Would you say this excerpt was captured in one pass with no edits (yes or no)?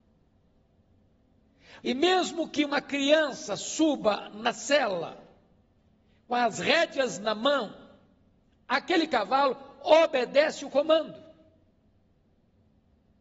no